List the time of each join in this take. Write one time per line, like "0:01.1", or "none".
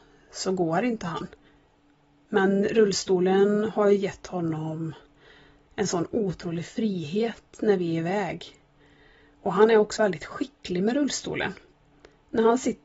0:10.0

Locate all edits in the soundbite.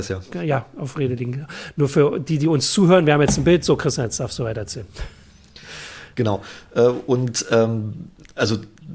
none

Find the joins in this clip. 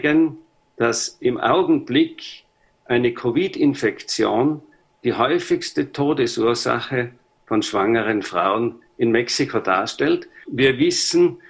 0:10.4

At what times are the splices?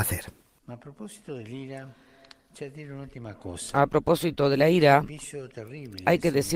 none

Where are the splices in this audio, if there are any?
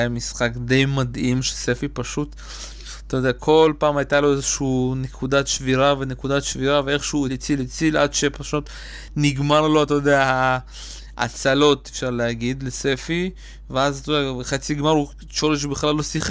0:07.3

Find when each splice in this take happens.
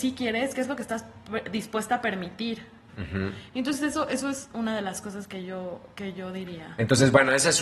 0:02.9

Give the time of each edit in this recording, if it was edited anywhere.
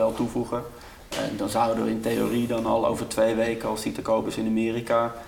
none

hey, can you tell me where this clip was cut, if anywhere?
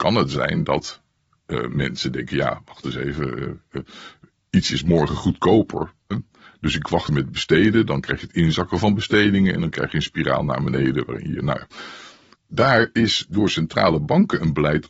0:07.1

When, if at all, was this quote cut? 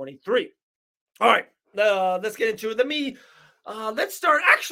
none

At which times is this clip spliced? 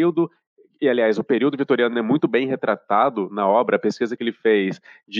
none

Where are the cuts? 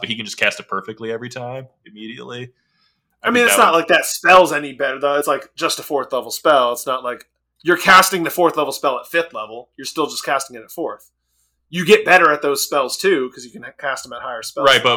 none

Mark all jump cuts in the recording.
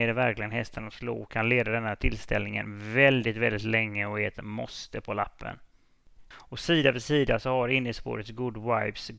0:06.3

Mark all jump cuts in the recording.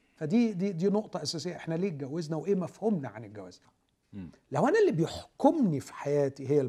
0:03.6

